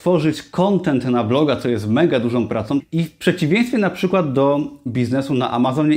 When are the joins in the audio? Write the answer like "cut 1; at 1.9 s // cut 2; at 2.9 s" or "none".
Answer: cut 1; at 2.8 s